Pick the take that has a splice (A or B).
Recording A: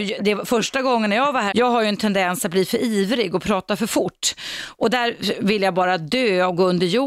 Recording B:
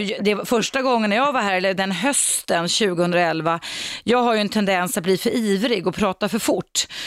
A